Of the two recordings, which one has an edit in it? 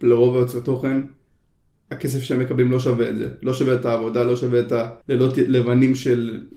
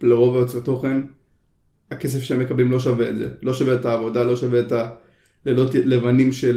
first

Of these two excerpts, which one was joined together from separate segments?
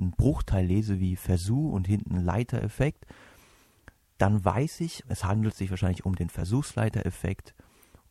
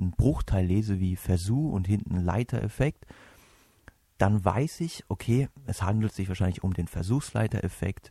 first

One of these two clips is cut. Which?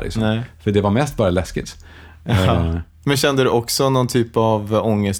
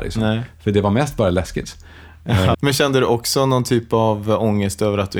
second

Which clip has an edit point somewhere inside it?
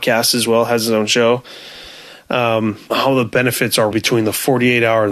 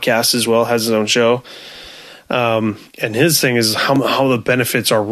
first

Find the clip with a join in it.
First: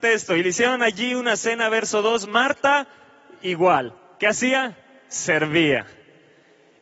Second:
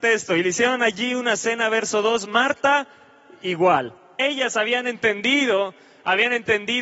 second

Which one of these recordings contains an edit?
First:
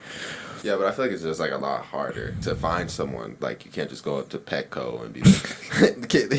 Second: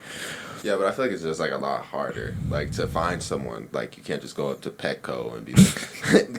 first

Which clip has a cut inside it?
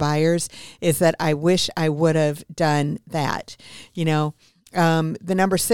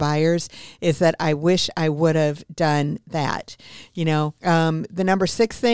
second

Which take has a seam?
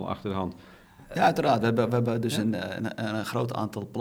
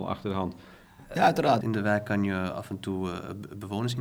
second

